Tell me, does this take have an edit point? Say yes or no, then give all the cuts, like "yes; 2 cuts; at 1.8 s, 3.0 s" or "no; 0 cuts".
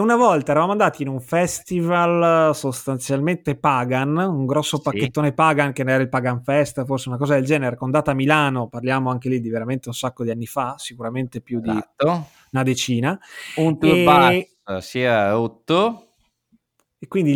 no; 0 cuts